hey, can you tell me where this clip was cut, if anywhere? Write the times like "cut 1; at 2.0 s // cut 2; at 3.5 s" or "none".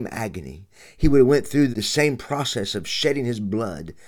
cut 1; at 1.7 s